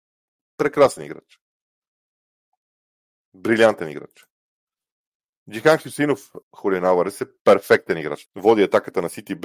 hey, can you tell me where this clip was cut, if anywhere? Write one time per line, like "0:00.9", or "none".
0:06.4
0:08.3